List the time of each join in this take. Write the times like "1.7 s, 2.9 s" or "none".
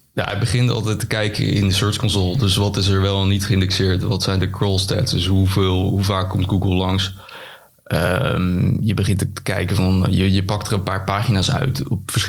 none